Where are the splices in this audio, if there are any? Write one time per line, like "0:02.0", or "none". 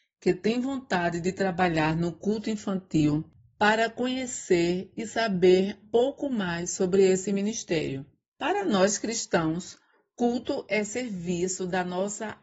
0:05.8
0:08.3